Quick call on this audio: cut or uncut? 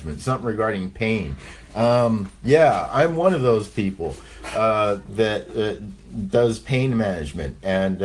uncut